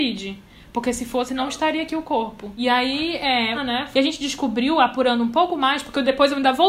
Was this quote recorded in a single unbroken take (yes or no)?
no